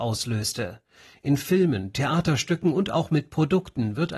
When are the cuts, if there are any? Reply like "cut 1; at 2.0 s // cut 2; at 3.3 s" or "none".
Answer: cut 1; at 1.9 s